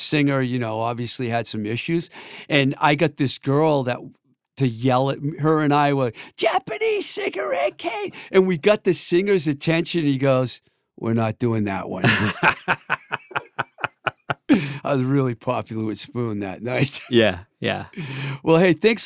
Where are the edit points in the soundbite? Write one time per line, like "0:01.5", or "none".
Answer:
none